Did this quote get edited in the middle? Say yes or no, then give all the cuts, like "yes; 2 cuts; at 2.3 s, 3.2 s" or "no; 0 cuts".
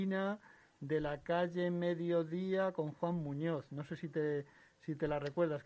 no; 0 cuts